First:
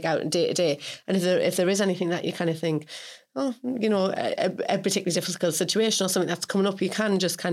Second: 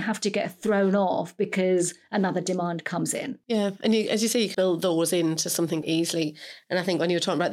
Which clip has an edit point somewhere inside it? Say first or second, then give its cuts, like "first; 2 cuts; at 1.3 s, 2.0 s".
second; 2 cuts; at 4.5 s, 5.8 s